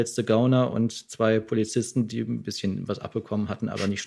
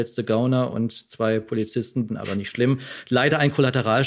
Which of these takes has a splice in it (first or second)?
second